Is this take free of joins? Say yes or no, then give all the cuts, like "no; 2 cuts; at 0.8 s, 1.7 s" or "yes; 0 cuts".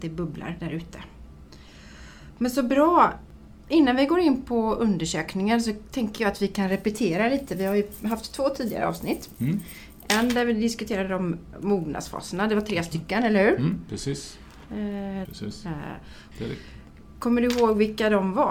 no; 3 cuts; at 11.5 s, 15.3 s, 16.3 s